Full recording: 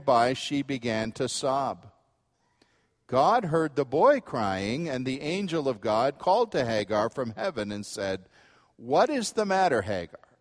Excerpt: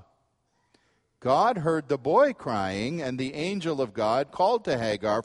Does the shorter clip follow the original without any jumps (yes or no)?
yes